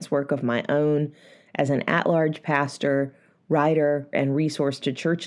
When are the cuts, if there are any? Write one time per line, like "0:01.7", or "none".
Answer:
0:04.1